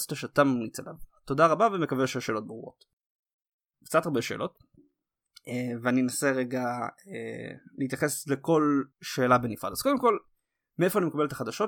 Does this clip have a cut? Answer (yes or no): yes